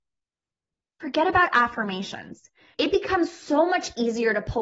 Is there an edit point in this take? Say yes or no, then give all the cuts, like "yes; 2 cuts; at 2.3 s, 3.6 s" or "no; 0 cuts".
yes; 1 cut; at 2.7 s